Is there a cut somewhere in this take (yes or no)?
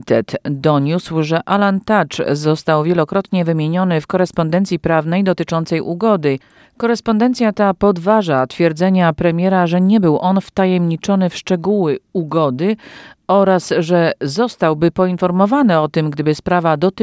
yes